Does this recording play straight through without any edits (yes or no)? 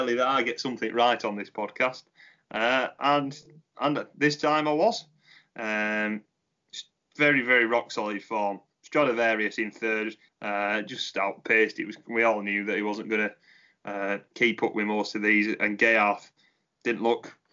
no